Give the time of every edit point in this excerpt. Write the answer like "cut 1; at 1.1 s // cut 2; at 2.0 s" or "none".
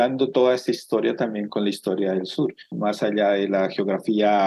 cut 1; at 1.5 s // cut 2; at 2.7 s